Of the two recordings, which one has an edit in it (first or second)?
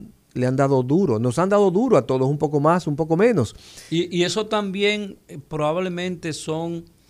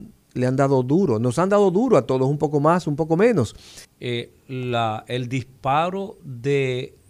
second